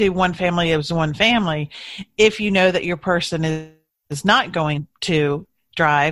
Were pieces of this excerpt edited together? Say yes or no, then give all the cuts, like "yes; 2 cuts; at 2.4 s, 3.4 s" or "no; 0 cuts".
no; 0 cuts